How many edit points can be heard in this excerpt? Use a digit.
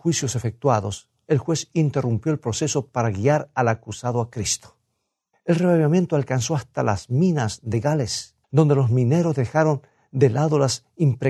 2